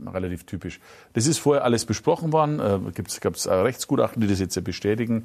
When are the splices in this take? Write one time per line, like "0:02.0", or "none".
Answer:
none